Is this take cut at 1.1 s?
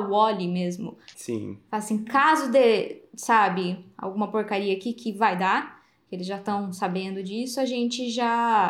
yes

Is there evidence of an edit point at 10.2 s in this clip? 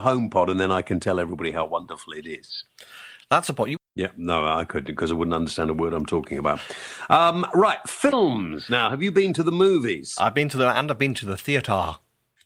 no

